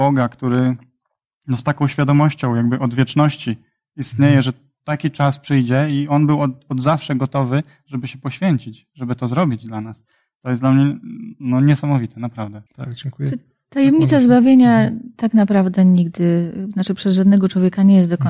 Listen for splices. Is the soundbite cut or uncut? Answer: cut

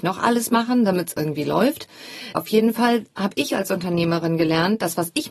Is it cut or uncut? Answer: cut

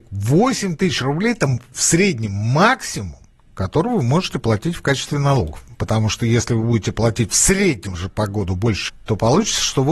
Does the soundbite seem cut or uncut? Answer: cut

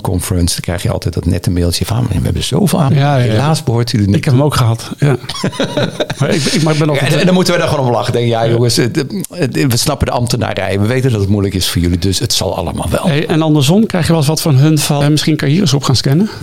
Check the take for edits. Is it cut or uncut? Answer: cut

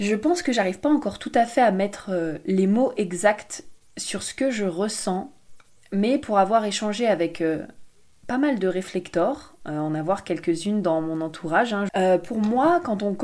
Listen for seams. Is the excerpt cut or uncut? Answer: cut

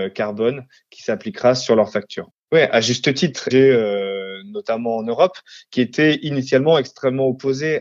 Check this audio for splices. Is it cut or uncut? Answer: cut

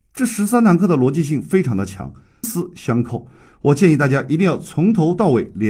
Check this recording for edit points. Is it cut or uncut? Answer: cut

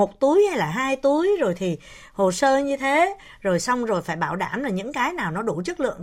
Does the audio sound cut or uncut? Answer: uncut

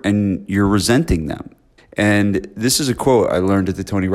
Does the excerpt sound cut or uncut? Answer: cut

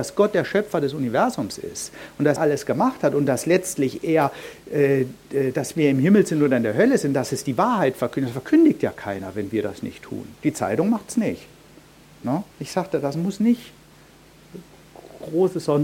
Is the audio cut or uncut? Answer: cut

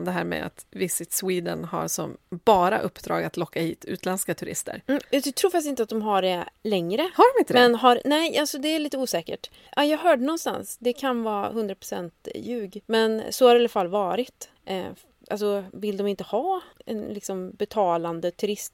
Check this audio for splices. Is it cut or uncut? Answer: cut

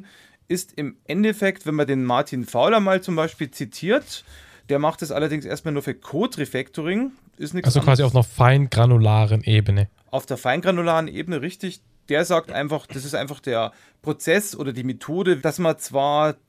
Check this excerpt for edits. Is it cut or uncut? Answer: cut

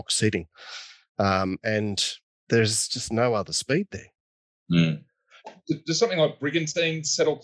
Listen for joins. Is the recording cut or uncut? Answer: uncut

